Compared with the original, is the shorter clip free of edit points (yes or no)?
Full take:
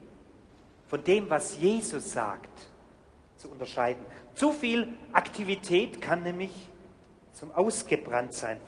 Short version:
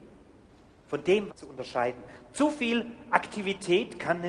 no